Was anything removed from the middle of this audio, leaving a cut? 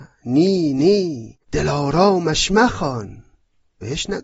yes; 1 cut; at 1.4 s

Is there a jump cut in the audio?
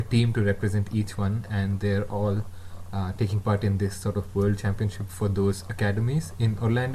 no; 0 cuts

